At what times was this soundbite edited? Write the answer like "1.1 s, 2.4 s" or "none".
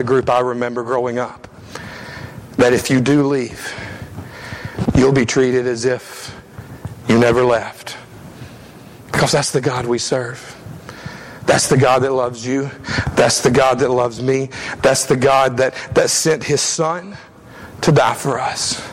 4.9 s